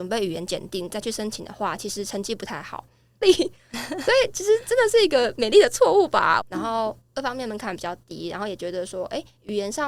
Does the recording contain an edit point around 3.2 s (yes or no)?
yes